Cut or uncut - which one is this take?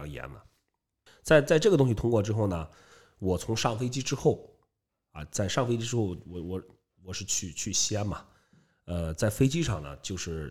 uncut